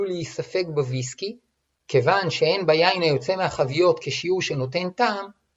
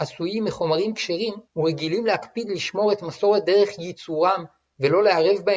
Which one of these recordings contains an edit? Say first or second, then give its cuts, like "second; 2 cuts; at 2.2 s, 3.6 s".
second; 1 cut; at 1.5 s